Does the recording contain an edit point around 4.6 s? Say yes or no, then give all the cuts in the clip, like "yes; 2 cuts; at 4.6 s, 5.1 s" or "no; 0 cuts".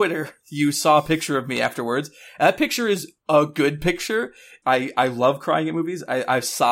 yes; 1 cut; at 4.6 s